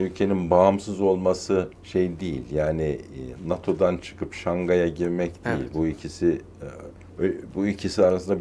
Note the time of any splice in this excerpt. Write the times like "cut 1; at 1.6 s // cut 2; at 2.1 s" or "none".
cut 1; at 1.7 s